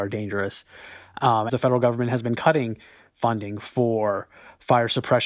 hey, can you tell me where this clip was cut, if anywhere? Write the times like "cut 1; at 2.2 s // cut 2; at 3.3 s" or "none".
cut 1; at 1.5 s